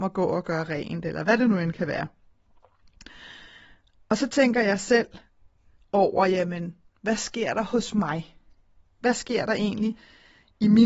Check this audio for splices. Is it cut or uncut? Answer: uncut